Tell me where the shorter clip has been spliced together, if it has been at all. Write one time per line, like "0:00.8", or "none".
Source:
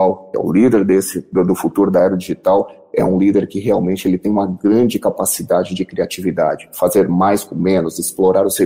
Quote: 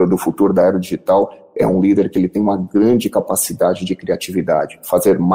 0:02.1